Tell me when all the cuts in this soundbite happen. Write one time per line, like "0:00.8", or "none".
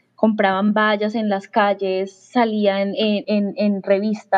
0:03.2